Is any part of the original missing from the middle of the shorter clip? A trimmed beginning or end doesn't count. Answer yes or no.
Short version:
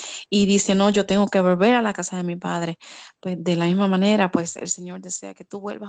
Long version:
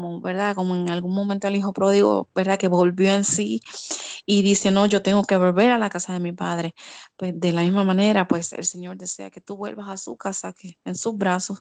no